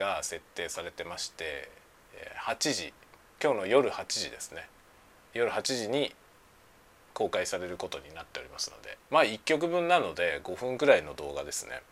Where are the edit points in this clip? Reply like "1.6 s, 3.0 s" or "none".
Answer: 5.3 s, 9.0 s

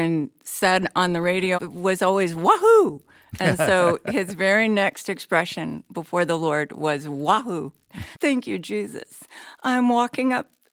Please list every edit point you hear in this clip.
1.5 s, 8.1 s

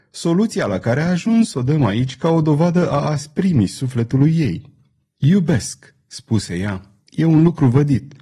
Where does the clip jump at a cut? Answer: none

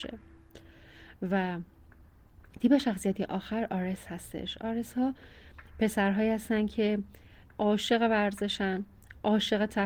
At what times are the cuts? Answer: none

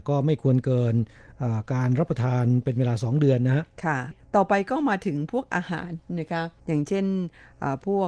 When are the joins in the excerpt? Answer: 6.6 s

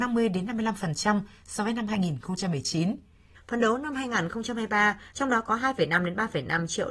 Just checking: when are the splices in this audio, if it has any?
3.4 s, 5.1 s

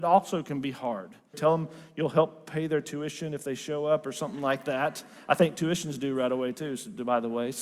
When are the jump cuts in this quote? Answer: 1.3 s

